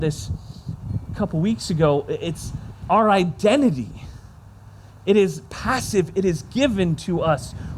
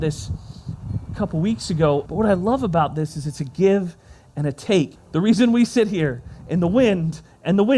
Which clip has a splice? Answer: second; 2 cuts; at 2.1 s, 5.0 s

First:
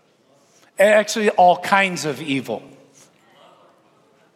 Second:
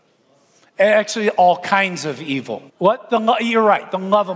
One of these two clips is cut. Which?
second; 1 cut; at 2.7 s

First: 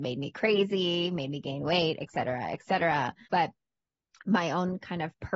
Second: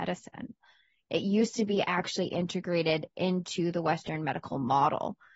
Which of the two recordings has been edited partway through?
first; 1 cut; at 3.3 s

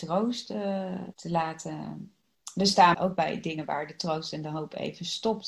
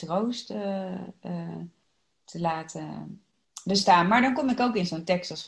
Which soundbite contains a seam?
first; 2 cuts; at 1.1 s, 2.9 s

